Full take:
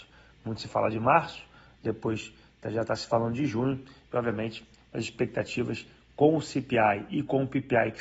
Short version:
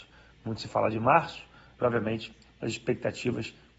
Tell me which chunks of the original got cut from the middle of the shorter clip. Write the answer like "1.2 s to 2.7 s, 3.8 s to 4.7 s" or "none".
1.8 s to 4.1 s